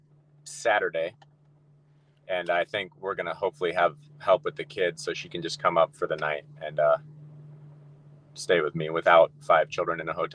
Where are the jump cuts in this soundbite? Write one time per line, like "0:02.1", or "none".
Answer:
none